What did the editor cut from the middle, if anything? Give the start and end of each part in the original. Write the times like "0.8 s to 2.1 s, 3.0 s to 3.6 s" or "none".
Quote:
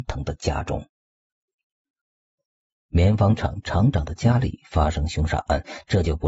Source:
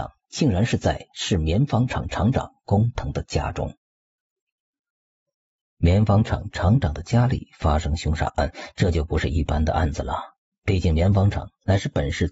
none